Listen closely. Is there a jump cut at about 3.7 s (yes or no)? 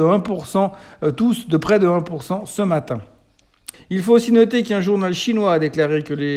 yes